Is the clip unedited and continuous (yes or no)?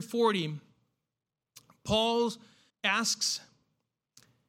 no